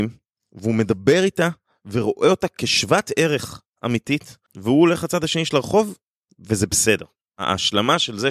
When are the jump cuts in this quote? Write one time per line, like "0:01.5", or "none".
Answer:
0:04.5
0:07.3